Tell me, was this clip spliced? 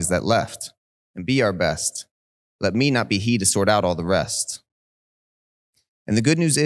no; 0 cuts

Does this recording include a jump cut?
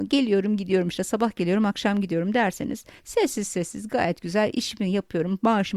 no; 0 cuts

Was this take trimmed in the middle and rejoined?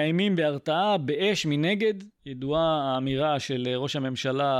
no; 0 cuts

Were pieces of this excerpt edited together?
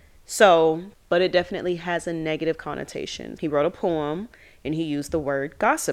yes; 2 cuts; at 0.9 s, 3.4 s

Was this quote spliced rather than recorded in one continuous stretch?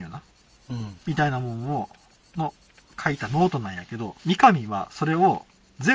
yes; 2 cuts; at 1.0 s, 4.2 s

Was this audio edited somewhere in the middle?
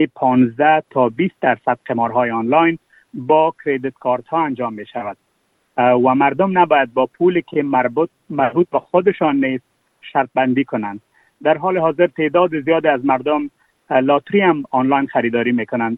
no; 0 cuts

